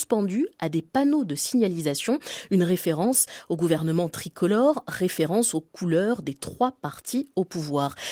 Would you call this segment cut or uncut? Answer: uncut